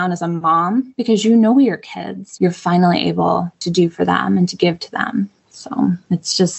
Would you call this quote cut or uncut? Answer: cut